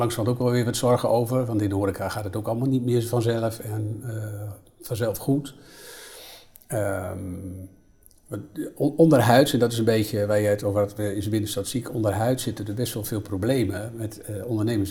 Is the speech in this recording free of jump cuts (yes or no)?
yes